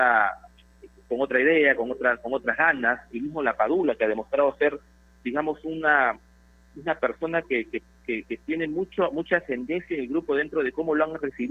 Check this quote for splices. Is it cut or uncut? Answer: uncut